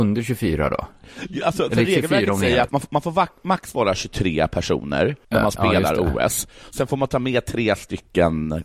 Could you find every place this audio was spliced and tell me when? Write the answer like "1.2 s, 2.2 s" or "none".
2.7 s, 5.2 s